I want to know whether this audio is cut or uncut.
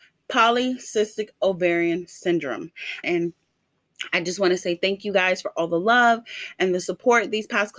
cut